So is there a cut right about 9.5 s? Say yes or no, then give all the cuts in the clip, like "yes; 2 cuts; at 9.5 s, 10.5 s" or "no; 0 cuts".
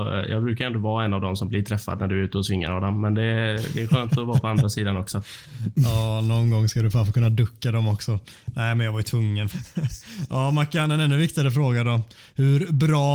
yes; 1 cut; at 9.5 s